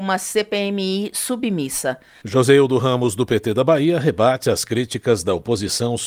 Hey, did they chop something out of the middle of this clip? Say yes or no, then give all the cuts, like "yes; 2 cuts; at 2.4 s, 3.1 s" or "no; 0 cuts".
yes; 1 cut; at 2.2 s